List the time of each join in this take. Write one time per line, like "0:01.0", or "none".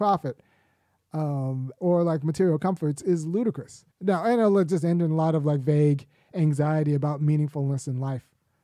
0:01.8
0:03.9